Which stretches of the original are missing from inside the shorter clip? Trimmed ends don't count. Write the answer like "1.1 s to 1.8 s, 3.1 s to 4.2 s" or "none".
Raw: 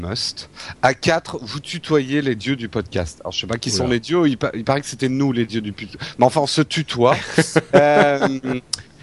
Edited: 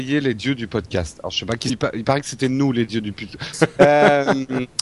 3.7 s to 4.3 s, 6.1 s to 7.5 s